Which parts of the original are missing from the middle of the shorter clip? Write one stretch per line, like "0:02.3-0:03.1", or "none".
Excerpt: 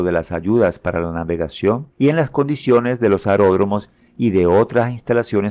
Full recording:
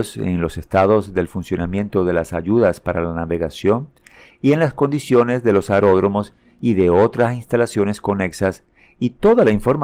0:03.9-0:04.4